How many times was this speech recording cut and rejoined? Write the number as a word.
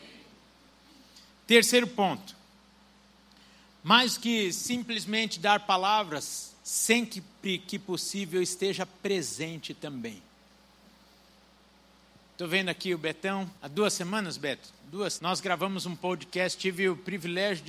two